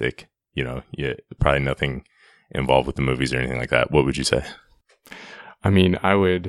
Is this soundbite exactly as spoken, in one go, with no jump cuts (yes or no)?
yes